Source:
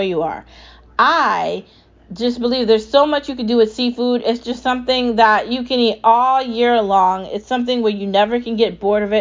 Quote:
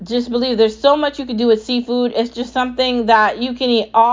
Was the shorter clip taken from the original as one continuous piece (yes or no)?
yes